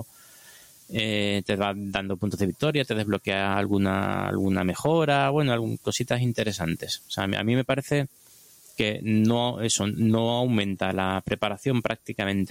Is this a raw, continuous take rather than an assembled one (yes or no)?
yes